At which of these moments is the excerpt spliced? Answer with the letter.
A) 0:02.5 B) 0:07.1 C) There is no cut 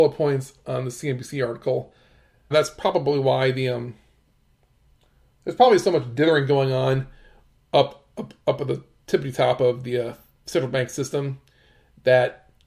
A